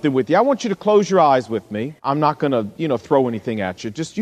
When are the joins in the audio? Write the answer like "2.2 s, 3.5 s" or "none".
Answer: 2.0 s